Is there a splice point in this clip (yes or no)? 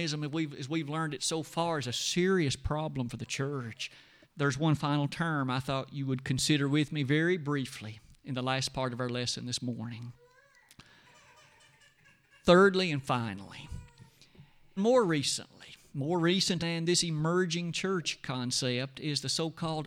yes